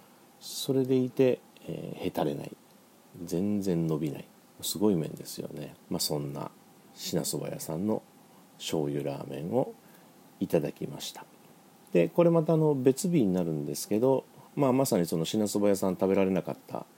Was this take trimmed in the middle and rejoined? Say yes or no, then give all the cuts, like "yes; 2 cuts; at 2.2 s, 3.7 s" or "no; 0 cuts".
yes; 2 cuts; at 5.8 s, 14.5 s